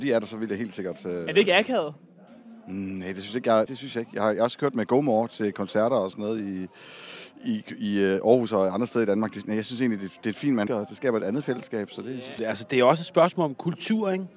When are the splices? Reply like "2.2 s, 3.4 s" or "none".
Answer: 3.7 s, 10.7 s, 12.4 s